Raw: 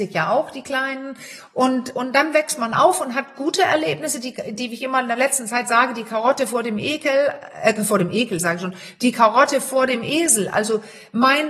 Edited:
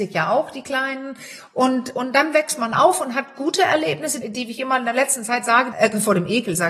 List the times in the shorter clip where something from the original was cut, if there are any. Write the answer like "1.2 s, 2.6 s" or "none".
4.2 s, 5.7 s